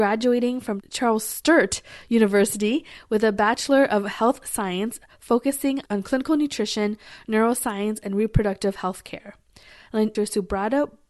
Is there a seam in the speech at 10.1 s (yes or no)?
yes